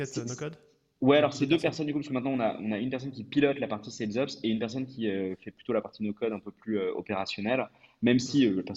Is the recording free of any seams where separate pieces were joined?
yes; 0 cuts

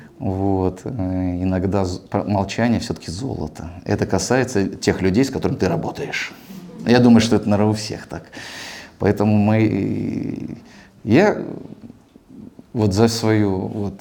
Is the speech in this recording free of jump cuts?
yes; 0 cuts

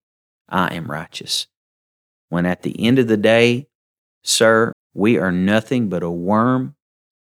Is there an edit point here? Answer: yes; 1 cut; at 4.7 s

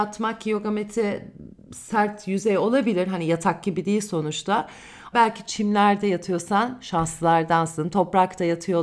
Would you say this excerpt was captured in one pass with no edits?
no; 1 cut; at 5.1 s

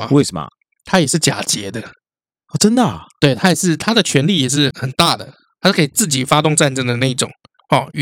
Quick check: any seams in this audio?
yes; 1 cut; at 4.7 s

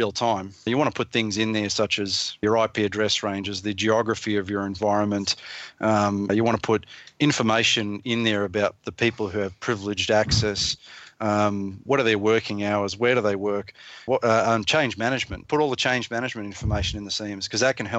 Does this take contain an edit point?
no; 0 cuts

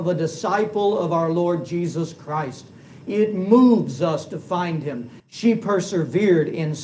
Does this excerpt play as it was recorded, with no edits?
no; 1 cut; at 5.2 s

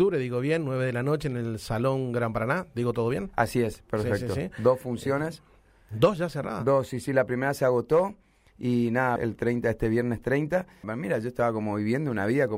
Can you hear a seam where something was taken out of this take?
yes; 2 cuts; at 9.2 s, 10.8 s

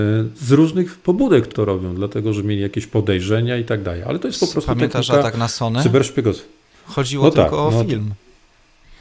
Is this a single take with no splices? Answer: no; 1 cut; at 1.5 s

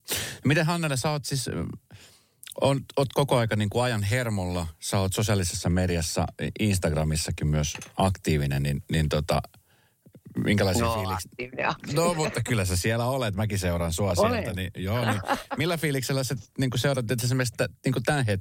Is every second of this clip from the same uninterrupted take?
yes; 0 cuts

